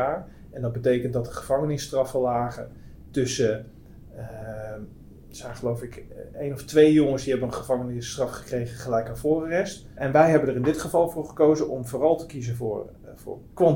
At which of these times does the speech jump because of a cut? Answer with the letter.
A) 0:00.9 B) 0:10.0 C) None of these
B